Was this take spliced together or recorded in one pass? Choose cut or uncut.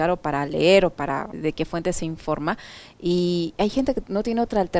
cut